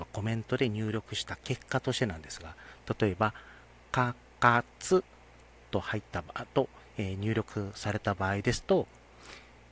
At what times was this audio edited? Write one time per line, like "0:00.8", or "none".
none